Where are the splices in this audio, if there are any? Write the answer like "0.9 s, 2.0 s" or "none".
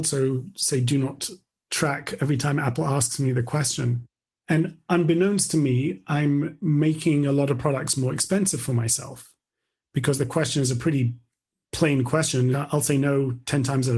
12.5 s